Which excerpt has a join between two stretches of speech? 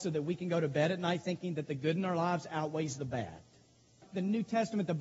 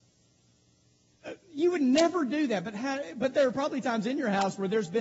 first; 1 cut; at 4.0 s

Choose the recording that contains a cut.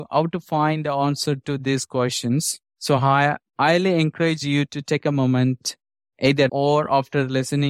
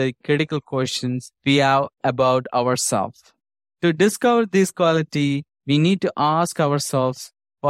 first; 1 cut; at 6.5 s

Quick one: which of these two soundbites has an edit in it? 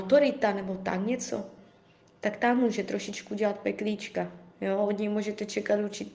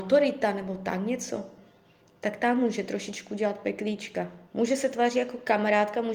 second; 1 cut; at 4.5 s

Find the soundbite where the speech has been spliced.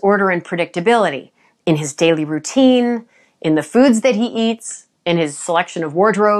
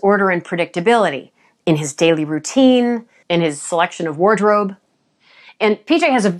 second; 1 cut; at 3.2 s

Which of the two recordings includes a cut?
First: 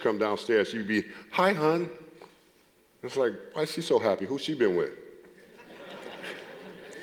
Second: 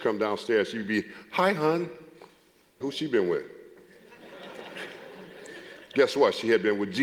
second; 1 cut; at 2.8 s

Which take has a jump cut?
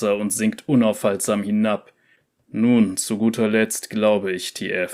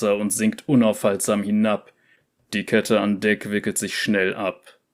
first; 1 cut; at 2.4 s

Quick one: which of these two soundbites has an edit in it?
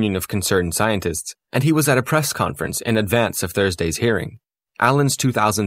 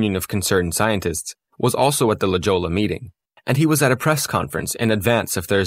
first; 2 cuts; at 1.5 s, 4.7 s

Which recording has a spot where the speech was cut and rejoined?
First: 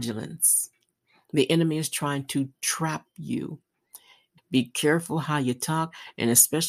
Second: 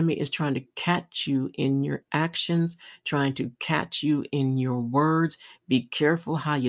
first; 1 cut; at 4.4 s

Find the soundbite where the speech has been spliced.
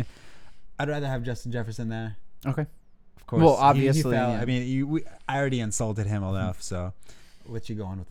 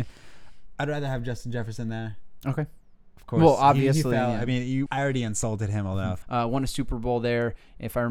second; 2 cuts; at 4.9 s, 6.2 s

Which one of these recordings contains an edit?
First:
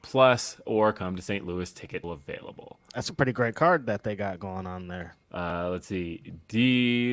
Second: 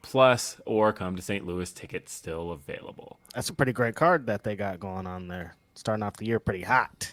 first; 2 cuts; at 2.0 s, 5.2 s

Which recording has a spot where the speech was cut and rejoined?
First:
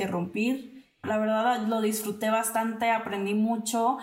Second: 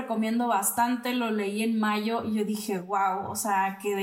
first; 1 cut; at 1.0 s

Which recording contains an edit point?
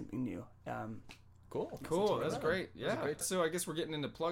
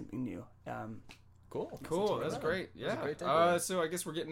first; 1 cut; at 3.2 s

